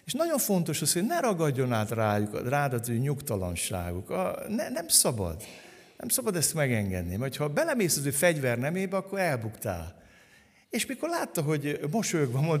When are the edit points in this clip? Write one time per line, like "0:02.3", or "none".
none